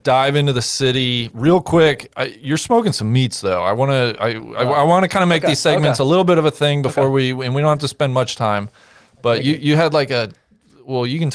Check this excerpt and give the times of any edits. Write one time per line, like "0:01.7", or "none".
none

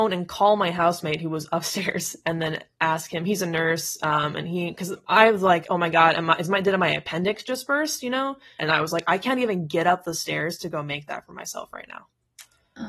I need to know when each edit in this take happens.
0:08.6

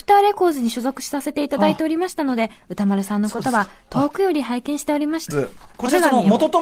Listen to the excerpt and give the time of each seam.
0:05.3

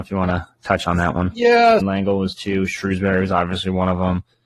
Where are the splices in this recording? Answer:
0:01.8

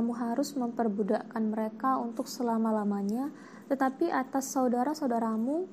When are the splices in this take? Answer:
none

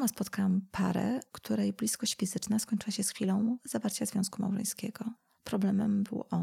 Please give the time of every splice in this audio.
none

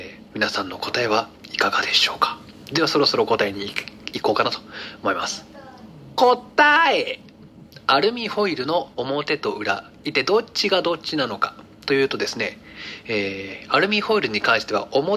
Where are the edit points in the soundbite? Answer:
0:08.9

